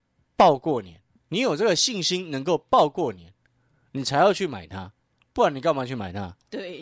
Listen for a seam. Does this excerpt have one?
no; 0 cuts

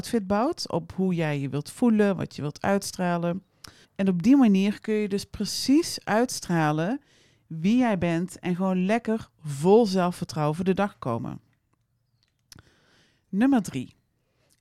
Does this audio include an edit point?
yes; 1 cut; at 3.8 s

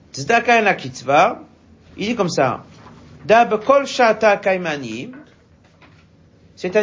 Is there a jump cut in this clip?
yes; 1 cut; at 1.9 s

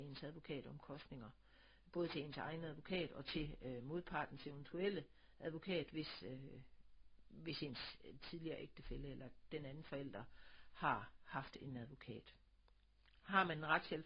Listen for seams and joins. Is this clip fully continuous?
yes; 0 cuts

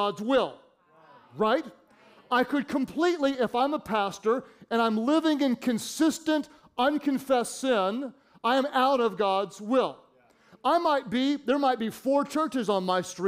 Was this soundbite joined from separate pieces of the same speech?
no; 0 cuts

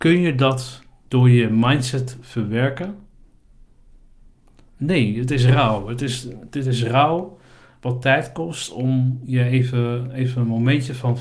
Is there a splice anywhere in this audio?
no; 0 cuts

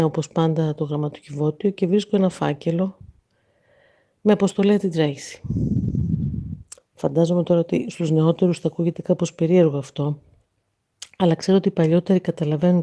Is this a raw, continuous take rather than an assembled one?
no; 1 cut; at 6.8 s

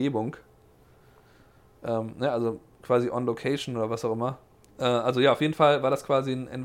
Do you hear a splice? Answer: yes; 1 cut; at 4.7 s

